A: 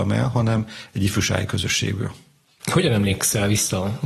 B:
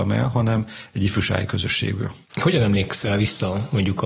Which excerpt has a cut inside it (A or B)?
B